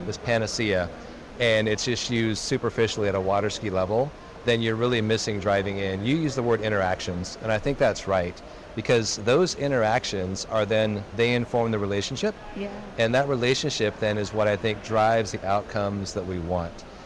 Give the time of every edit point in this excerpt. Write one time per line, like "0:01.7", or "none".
0:11.1